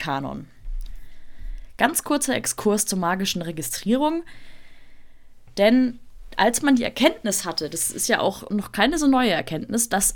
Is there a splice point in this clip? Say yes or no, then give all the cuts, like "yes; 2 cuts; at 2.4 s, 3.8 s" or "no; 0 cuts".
no; 0 cuts